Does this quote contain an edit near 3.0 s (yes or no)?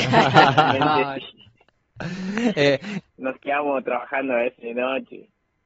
yes